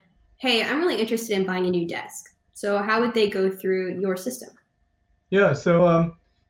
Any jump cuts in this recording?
no; 0 cuts

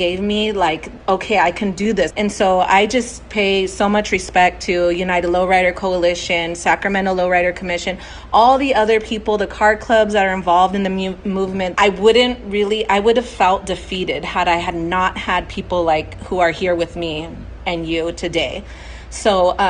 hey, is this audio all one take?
no; 2 cuts; at 2.1 s, 11.7 s

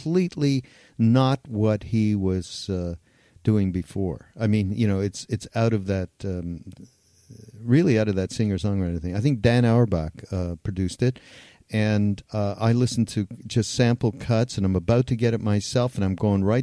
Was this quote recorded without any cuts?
yes; 0 cuts

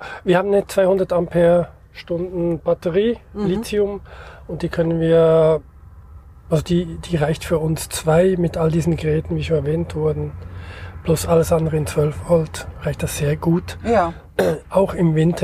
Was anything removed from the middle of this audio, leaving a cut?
no; 0 cuts

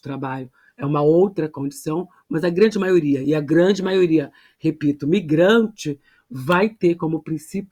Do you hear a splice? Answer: no; 0 cuts

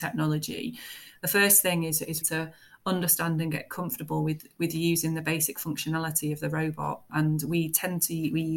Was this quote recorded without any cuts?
no; 2 cuts; at 1.2 s, 2.2 s

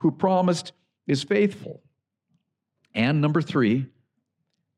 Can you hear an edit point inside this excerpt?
no; 0 cuts

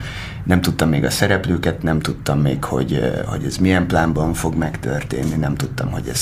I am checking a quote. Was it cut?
no; 0 cuts

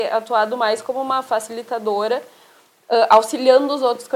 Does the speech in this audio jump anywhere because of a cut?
no; 0 cuts

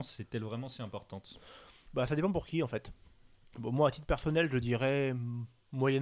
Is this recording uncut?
yes; 0 cuts

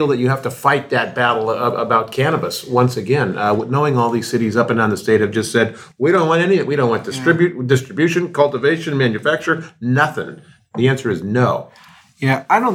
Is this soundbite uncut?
yes; 0 cuts

